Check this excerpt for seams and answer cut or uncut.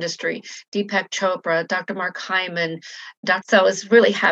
cut